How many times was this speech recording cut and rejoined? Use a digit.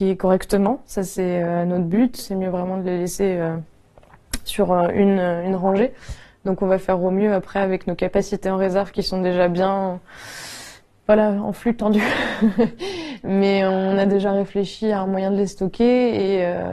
1